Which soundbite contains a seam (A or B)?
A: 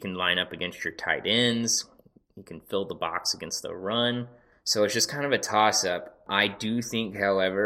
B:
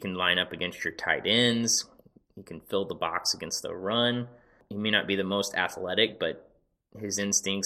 A